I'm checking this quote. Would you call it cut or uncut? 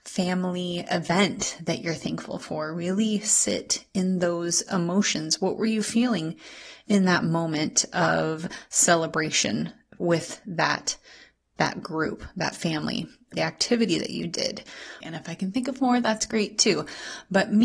cut